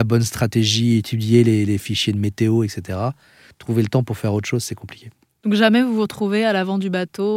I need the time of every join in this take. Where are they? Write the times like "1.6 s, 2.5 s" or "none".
none